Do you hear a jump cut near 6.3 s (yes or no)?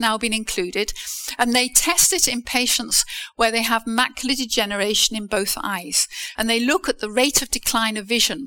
yes